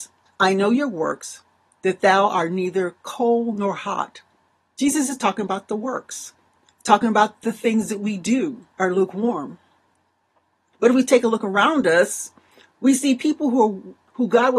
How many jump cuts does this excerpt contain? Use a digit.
1